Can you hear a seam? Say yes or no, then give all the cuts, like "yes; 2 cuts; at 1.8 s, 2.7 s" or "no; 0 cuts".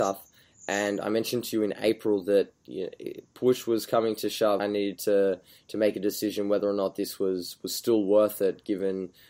yes; 1 cut; at 4.6 s